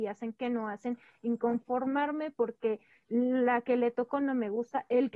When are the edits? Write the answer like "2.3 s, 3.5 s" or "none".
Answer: none